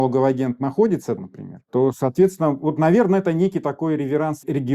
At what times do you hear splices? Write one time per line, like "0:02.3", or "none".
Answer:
0:01.2